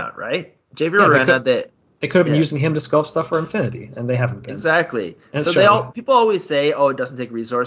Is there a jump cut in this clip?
no; 0 cuts

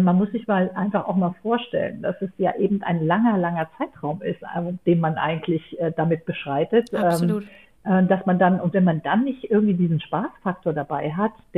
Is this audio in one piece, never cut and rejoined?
yes; 0 cuts

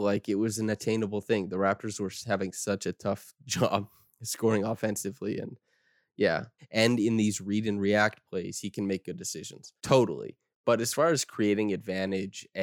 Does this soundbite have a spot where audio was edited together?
yes; 2 cuts; at 6.6 s, 9.8 s

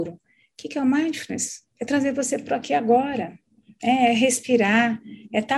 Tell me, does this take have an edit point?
yes; 1 cut; at 1.7 s

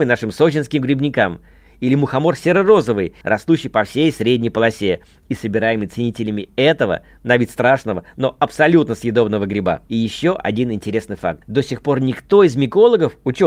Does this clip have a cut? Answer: yes; 1 cut; at 3.2 s

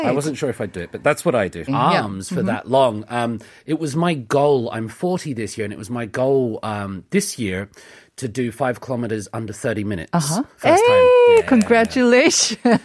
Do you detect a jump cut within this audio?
yes; 2 cuts; at 1.7 s, 10.6 s

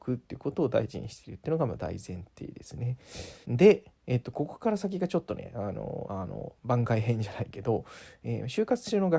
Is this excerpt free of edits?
no; 2 cuts; at 3.4 s, 6.0 s

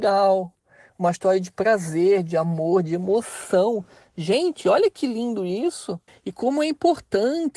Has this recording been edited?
yes; 1 cut; at 6.1 s

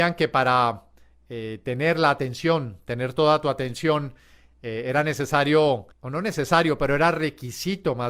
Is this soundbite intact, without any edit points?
no; 1 cut; at 5.9 s

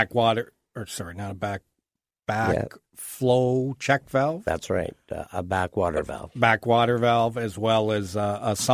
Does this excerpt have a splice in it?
no; 0 cuts

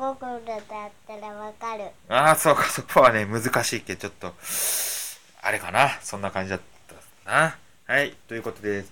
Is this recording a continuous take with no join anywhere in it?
no; 1 cut; at 2.9 s

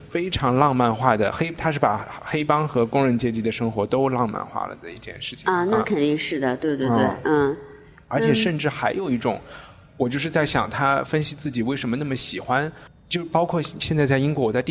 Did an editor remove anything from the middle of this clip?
no; 0 cuts

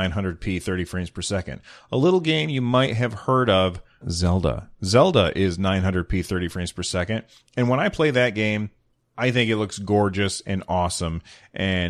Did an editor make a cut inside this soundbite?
yes; 1 cut; at 4.0 s

